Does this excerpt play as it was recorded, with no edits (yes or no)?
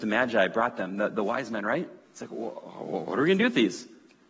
no